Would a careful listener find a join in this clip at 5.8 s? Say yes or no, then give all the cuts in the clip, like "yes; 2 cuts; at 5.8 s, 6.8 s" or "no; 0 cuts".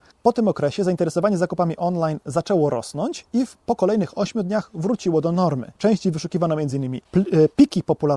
yes; 2 cuts; at 5.8 s, 7.0 s